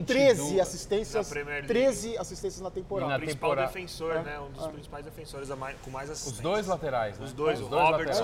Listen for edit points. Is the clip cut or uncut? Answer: uncut